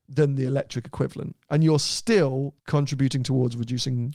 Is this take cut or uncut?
cut